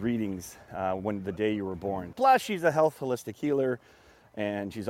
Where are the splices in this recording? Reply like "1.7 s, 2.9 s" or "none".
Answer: 2.1 s